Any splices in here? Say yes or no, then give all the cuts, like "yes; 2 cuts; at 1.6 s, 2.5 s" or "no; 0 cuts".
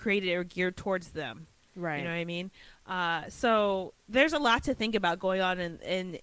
no; 0 cuts